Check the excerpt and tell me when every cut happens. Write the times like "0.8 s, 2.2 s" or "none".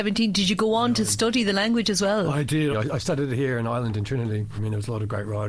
2.7 s, 4.6 s